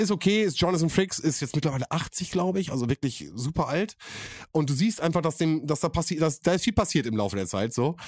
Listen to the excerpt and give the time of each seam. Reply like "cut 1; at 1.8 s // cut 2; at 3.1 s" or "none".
none